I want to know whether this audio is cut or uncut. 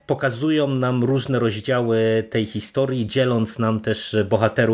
uncut